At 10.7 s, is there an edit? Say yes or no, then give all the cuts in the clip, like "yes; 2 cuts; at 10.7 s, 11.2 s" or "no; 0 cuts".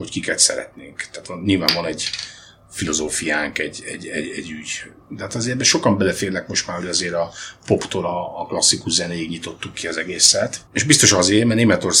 yes; 1 cut; at 10.7 s